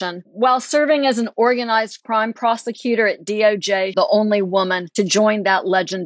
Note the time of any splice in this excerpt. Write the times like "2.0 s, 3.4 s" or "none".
3.9 s